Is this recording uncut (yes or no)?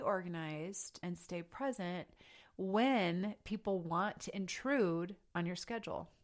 no